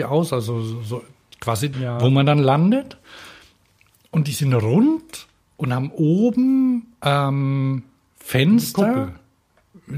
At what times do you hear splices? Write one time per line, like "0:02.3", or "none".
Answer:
0:01.7